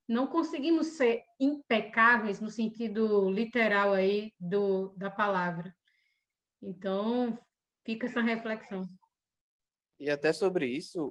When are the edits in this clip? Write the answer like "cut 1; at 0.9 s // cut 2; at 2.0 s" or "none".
none